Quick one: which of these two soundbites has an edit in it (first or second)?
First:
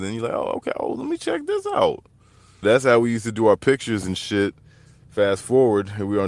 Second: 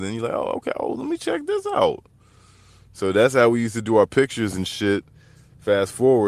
first